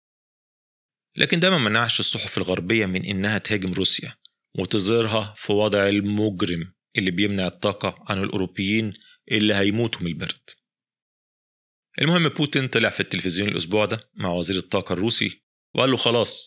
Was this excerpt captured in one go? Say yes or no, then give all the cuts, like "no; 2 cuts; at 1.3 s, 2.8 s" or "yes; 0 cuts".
yes; 0 cuts